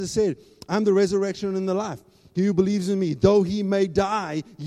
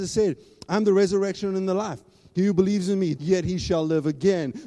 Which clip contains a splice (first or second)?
second